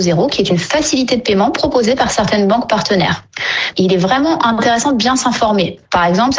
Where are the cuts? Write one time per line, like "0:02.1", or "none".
0:03.7